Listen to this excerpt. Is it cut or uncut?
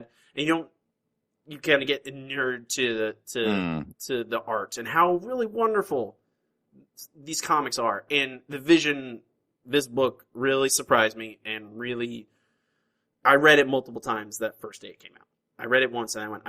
uncut